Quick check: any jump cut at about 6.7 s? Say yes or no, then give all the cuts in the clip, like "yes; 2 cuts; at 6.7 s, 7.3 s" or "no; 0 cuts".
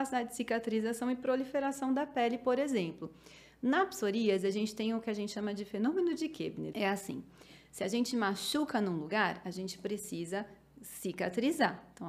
yes; 1 cut; at 6.7 s